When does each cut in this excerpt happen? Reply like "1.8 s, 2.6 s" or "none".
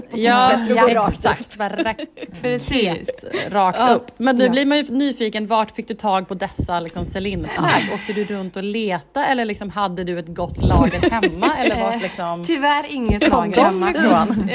none